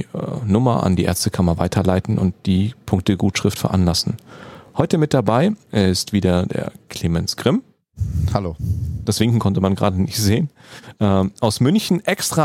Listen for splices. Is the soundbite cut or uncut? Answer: uncut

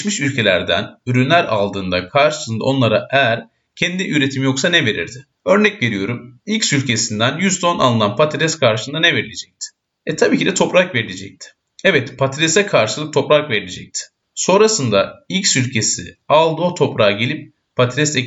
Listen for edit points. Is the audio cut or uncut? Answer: uncut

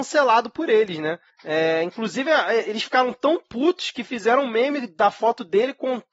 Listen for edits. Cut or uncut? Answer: uncut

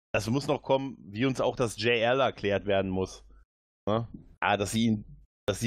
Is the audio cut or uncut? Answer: cut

